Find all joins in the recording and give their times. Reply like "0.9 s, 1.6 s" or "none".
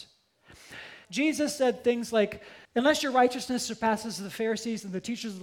1.0 s, 2.6 s

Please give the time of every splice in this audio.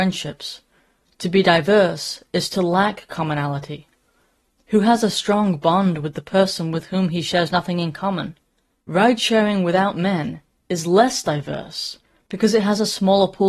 8.8 s

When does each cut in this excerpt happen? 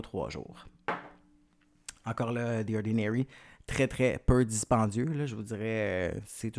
none

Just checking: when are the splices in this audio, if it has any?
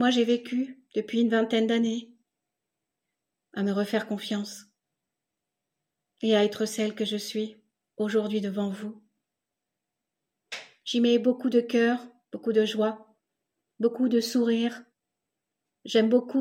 3.4 s

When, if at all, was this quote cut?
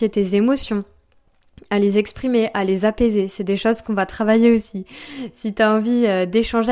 none

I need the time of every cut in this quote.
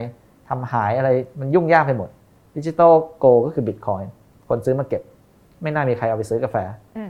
none

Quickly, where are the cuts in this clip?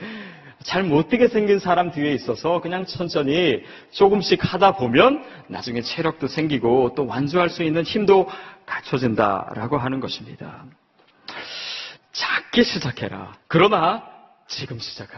2.9 s, 12.0 s, 13.4 s

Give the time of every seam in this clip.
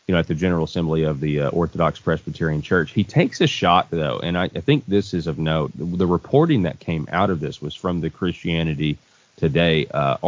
none

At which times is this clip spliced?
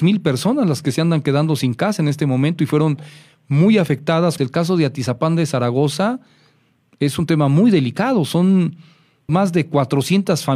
4.4 s, 9.3 s

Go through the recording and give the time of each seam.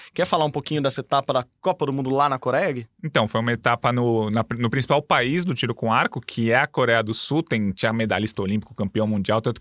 none

